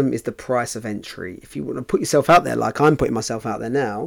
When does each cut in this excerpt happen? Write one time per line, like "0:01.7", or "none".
none